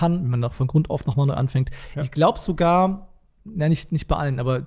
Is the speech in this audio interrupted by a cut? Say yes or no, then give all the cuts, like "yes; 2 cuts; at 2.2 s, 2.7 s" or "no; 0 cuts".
no; 0 cuts